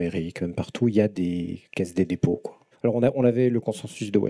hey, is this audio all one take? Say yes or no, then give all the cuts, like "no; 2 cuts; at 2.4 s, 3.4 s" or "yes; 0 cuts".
no; 1 cut; at 2.7 s